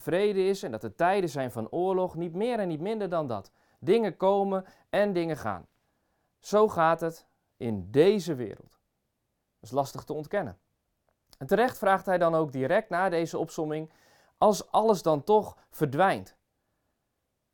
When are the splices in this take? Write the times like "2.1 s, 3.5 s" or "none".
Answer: none